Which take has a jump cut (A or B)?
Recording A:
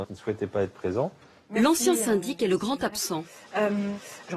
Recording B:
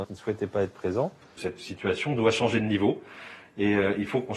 B